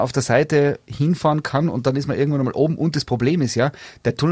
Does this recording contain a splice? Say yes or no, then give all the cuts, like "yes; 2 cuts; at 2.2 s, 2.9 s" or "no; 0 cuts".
no; 0 cuts